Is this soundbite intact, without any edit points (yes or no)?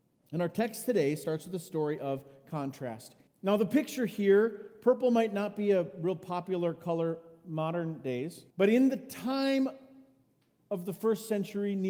no